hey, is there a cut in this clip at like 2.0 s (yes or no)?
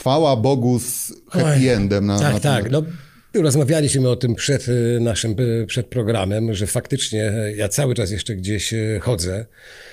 no